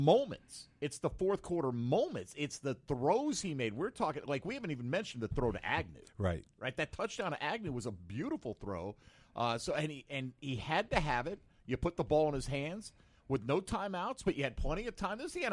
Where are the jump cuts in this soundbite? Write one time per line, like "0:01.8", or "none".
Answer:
none